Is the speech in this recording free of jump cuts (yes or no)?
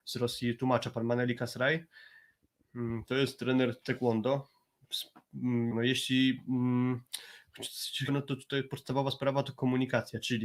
no